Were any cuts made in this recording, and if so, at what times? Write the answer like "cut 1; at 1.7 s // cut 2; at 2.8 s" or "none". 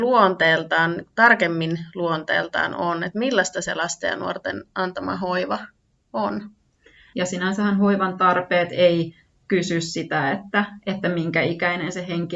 cut 1; at 7.1 s